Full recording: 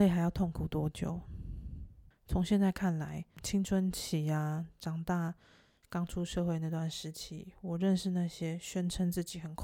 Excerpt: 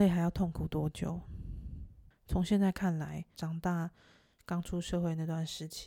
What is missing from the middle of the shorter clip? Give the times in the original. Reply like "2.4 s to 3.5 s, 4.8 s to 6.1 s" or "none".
3.3 s to 4.8 s